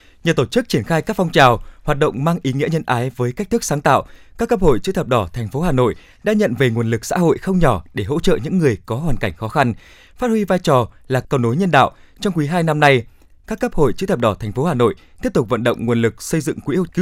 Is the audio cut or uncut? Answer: uncut